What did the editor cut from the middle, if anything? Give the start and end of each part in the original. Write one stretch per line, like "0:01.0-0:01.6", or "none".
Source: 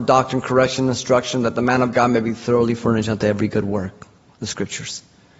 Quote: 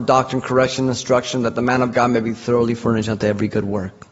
none